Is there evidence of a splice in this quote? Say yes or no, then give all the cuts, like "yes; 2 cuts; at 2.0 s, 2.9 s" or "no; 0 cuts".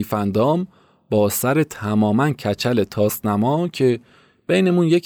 no; 0 cuts